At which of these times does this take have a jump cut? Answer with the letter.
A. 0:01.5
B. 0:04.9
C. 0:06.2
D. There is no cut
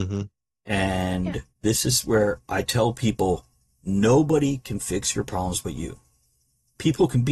A